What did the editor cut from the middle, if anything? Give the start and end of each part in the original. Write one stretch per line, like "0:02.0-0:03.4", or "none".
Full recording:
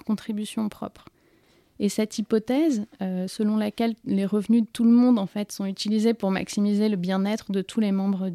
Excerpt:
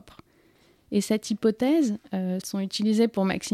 0:03.3-0:05.5